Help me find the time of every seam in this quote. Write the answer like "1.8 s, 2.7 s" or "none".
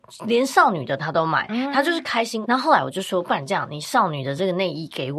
2.4 s